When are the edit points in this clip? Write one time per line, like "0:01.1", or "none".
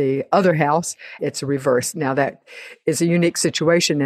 0:01.2